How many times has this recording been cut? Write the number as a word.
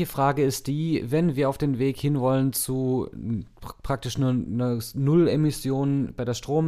zero